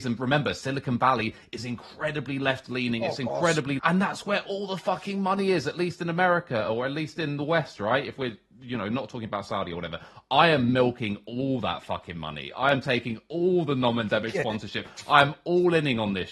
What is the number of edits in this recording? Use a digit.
1